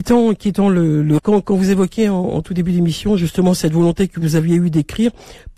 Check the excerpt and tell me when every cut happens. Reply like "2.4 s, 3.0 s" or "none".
1.2 s